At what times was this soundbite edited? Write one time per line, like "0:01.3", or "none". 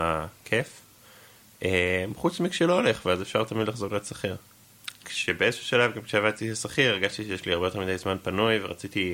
0:05.0